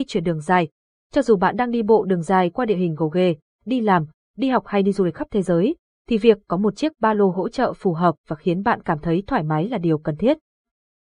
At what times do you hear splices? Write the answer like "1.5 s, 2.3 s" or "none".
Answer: 0.9 s